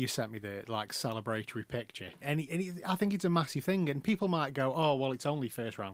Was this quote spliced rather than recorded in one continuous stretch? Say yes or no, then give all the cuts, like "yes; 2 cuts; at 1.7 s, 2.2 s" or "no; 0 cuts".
yes; 1 cut; at 2.2 s